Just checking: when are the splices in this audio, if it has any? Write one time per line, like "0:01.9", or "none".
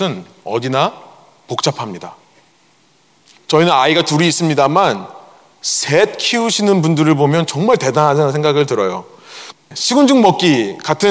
0:03.3
0:09.5